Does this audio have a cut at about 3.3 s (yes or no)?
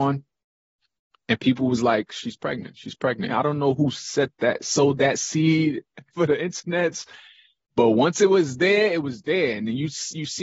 yes